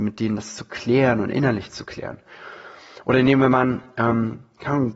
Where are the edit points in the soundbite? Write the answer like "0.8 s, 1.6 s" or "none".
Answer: none